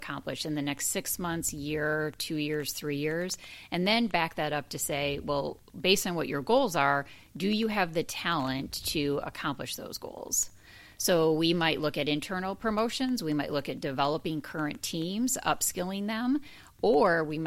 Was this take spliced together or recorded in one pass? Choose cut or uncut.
uncut